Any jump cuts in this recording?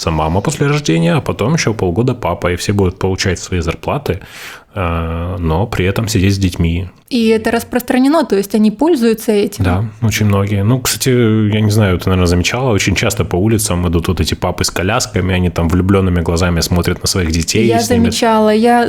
no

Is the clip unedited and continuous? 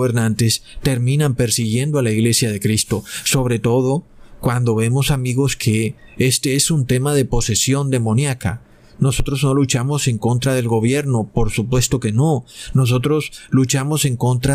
yes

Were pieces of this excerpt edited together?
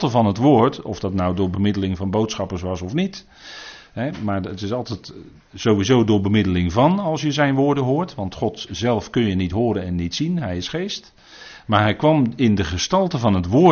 no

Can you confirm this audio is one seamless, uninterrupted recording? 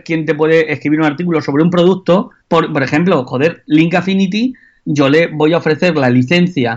no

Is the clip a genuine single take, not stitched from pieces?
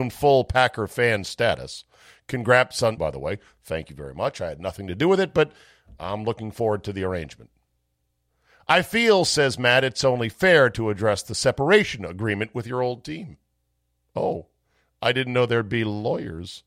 no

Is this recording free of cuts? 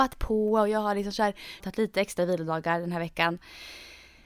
no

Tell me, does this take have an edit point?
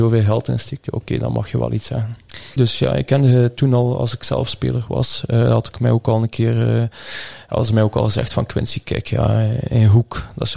yes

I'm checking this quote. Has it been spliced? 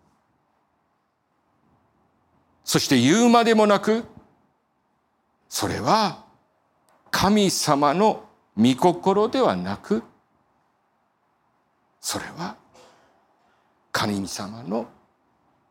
no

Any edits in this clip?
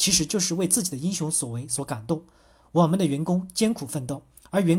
no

